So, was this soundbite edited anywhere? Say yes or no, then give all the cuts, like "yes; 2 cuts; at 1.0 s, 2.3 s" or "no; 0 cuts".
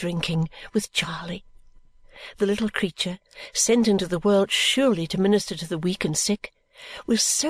no; 0 cuts